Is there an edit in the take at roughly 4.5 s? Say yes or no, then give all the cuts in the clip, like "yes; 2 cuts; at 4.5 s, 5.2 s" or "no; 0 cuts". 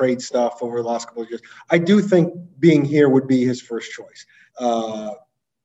yes; 1 cut; at 4.5 s